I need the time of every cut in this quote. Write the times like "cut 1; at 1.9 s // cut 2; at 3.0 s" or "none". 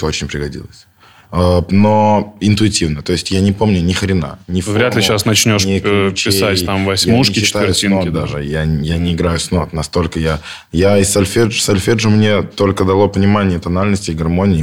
none